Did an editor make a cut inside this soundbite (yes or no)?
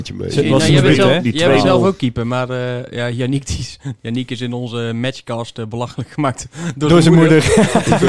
no